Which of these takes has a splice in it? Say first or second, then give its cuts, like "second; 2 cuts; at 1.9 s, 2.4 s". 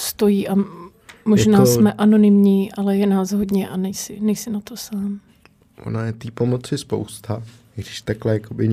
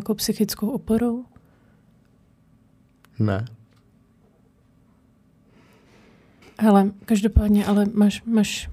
second; 1 cut; at 6.4 s